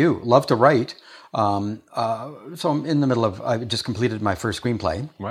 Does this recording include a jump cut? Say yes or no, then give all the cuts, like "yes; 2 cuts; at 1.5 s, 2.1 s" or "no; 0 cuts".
no; 0 cuts